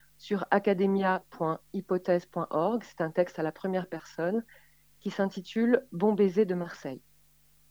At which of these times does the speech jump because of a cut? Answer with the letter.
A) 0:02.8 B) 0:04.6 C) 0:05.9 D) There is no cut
D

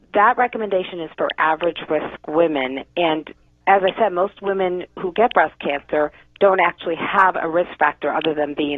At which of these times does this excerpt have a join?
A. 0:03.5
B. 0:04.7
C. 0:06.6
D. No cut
A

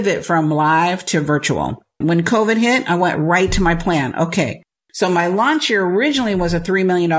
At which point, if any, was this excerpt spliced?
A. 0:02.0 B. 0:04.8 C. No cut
A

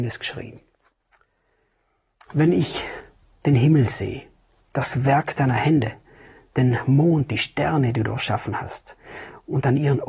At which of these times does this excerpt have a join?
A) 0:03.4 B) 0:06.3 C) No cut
C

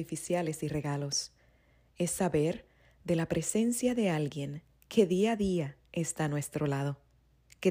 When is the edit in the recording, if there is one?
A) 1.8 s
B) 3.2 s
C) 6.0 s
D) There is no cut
D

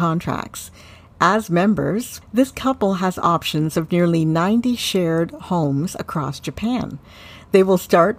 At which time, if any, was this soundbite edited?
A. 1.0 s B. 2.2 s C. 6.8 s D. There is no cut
B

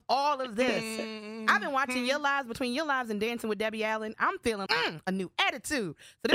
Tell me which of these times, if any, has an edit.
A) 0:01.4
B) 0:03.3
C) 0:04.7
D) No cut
C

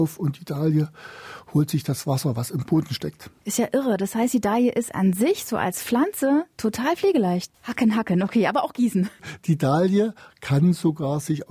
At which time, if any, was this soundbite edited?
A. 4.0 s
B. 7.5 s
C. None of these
B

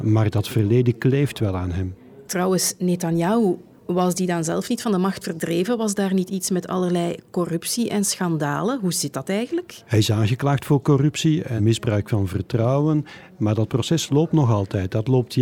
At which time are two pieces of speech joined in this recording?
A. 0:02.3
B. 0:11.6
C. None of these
B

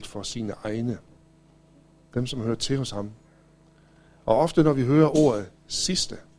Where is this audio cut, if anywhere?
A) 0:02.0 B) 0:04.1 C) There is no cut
B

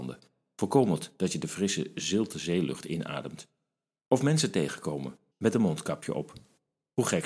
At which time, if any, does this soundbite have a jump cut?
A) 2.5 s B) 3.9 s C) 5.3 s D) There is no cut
C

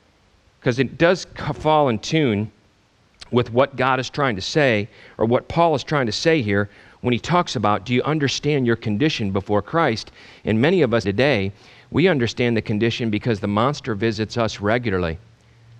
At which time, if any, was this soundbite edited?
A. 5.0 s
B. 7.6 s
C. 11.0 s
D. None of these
C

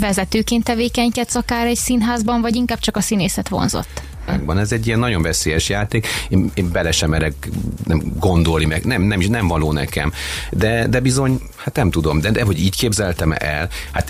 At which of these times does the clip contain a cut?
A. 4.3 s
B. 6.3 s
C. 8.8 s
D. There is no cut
A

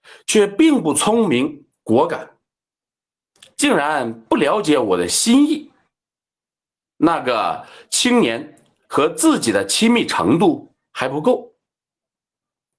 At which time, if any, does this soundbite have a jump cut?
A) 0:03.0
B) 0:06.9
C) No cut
B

